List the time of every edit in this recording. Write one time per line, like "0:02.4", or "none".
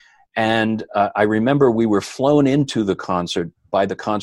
none